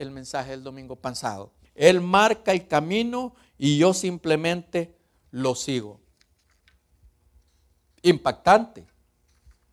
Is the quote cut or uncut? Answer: cut